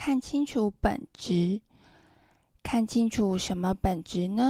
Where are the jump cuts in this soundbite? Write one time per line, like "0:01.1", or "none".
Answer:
none